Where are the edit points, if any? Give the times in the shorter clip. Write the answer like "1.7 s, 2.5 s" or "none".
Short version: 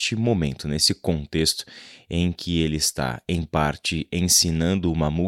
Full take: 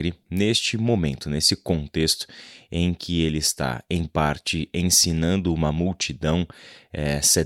none

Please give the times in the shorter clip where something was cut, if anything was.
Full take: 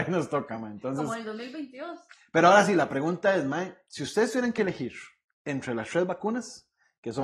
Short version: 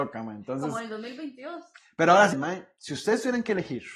2.3 s

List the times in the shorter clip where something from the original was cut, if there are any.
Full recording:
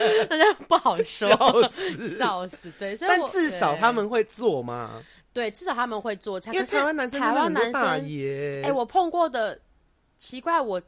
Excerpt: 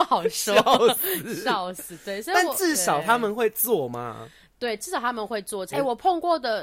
5.7 s

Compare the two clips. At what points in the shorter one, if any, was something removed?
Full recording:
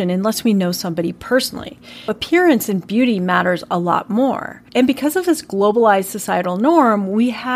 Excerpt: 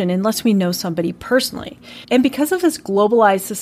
2.0 s

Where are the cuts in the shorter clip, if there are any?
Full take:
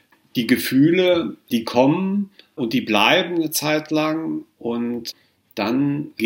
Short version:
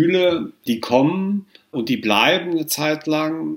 none

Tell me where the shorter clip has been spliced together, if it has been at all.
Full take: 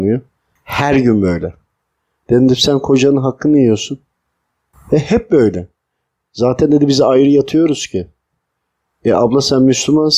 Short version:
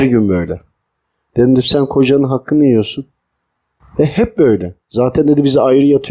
4.8 s

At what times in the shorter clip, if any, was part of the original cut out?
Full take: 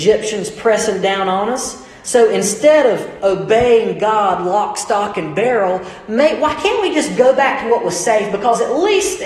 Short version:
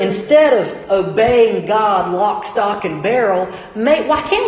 none

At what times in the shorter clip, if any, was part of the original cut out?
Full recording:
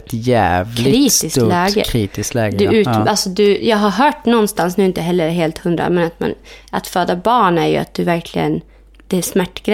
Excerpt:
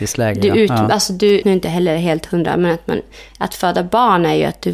1.4 s

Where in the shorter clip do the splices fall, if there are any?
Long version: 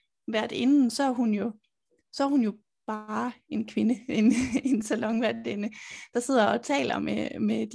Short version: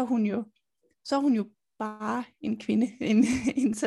none

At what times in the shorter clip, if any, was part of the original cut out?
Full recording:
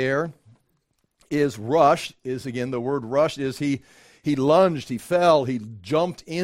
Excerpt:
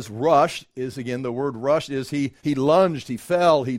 2.4 s

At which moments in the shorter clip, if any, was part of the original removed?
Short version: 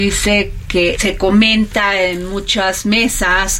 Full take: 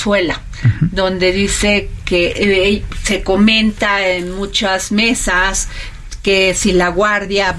1.0 s

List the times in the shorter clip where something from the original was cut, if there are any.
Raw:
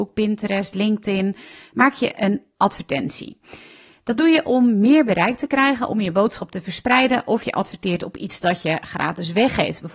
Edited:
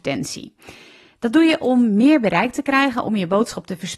none

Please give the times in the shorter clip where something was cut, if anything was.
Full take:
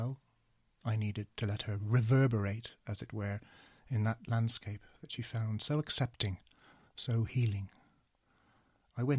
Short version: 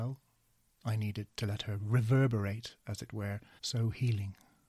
3.6 s

